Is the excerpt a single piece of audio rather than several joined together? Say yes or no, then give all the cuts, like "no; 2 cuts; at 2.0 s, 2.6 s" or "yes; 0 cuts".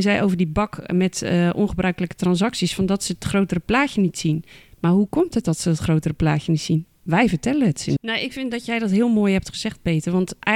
no; 1 cut; at 8.0 s